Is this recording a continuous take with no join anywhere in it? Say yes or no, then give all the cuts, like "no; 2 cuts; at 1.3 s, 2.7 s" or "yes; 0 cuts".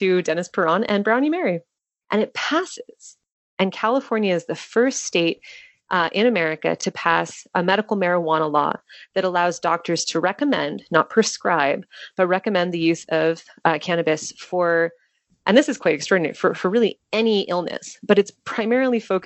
no; 1 cut; at 2.0 s